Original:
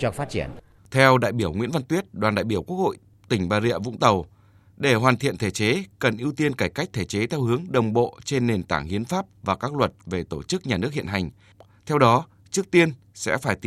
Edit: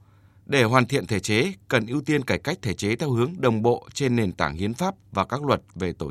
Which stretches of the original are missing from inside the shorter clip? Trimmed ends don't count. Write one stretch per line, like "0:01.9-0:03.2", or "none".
none